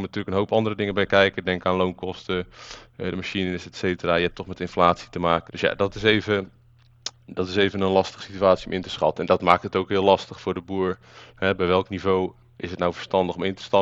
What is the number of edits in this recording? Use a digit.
1